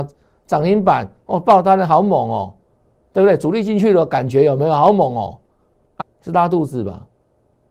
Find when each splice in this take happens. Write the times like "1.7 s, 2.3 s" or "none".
6.0 s